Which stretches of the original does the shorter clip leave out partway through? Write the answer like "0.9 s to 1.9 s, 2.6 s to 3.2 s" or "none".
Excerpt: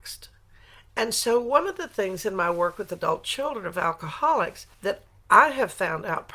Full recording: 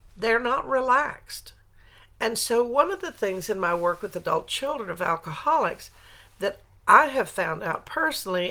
6.0 s to 6.3 s